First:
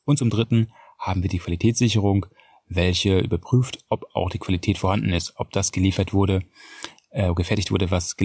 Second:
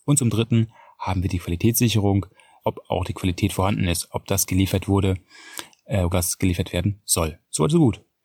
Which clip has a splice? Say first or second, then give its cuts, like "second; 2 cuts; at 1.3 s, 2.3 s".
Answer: second; 2 cuts; at 2.6 s, 6.1 s